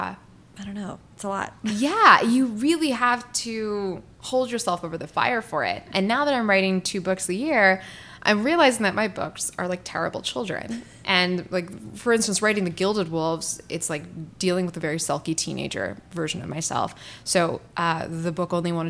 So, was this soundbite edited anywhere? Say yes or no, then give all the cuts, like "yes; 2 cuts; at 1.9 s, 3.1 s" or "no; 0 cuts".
no; 0 cuts